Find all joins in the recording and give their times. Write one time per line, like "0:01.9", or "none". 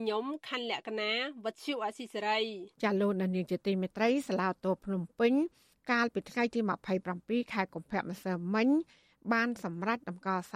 0:02.7